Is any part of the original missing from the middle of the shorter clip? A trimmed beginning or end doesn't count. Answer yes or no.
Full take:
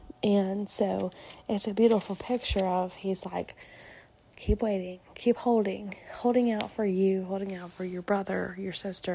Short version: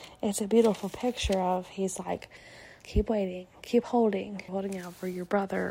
yes